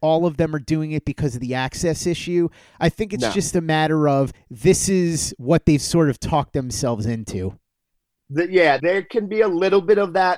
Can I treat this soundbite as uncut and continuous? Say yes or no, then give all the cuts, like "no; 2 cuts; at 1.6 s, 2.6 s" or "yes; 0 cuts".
no; 1 cut; at 8.8 s